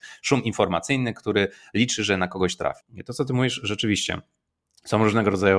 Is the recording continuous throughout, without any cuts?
no; 1 cut; at 2.8 s

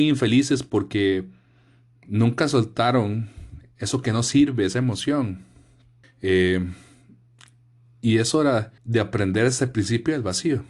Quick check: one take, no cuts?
no; 2 cuts; at 6.0 s, 8.8 s

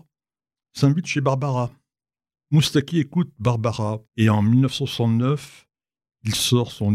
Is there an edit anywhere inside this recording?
yes; 2 cuts; at 2.3 s, 4.1 s

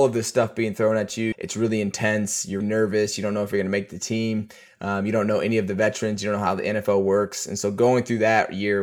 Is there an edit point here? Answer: yes; 2 cuts; at 1.3 s, 2.6 s

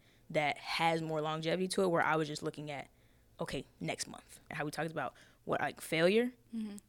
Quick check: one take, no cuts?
no; 1 cut; at 4.5 s

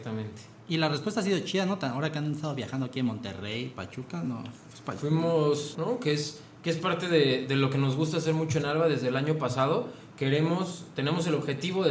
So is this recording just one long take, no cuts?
no; 1 cut; at 5.7 s

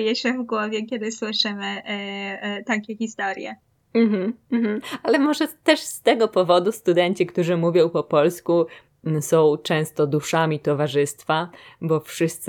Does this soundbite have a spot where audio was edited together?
no; 0 cuts

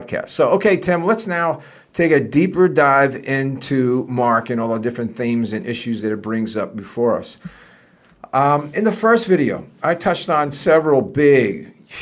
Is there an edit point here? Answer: no; 0 cuts

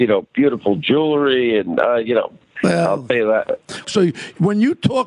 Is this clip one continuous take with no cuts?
no; 2 cuts; at 2.6 s, 3.8 s

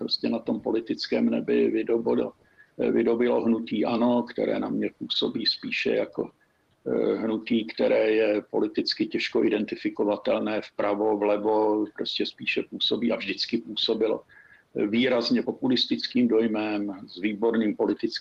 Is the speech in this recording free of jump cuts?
no; 1 cut; at 15.4 s

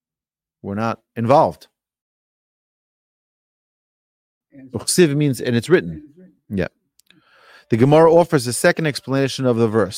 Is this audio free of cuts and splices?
yes; 0 cuts

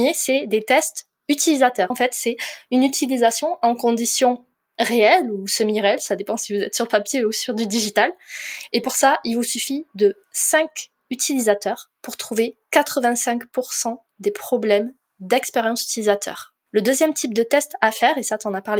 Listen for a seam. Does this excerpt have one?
yes; 2 cuts; at 1.9 s, 16.7 s

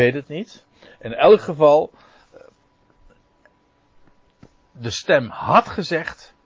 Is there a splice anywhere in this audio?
no; 0 cuts

